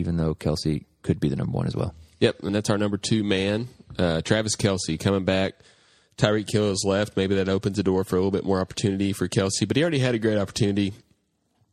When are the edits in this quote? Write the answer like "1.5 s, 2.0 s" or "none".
2.5 s